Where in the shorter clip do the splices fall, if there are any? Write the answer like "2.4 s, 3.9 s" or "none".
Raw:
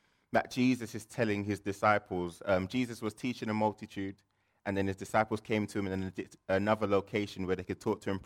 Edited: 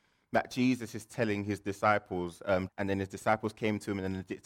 2.7 s